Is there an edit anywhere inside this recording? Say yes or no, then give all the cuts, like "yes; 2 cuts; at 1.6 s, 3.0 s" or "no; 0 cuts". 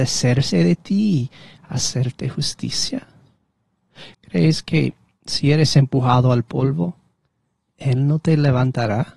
yes; 1 cut; at 4.1 s